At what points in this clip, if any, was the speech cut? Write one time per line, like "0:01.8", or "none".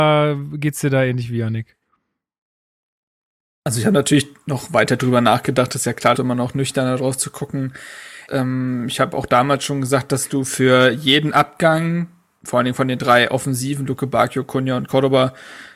0:06.1
0:08.3